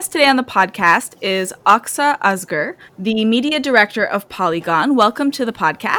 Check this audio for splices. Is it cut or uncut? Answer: cut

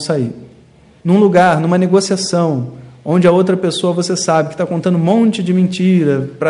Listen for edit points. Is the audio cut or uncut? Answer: cut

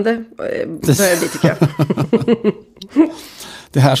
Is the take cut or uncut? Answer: uncut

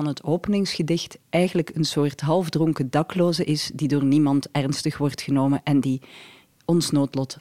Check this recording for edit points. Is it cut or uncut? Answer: uncut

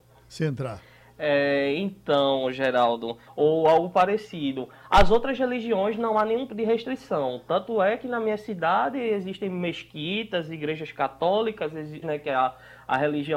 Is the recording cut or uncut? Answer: cut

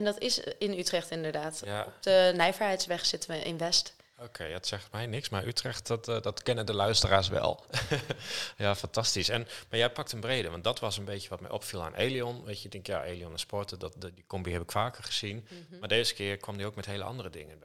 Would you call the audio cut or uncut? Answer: uncut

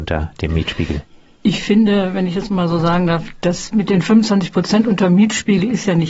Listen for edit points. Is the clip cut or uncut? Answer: uncut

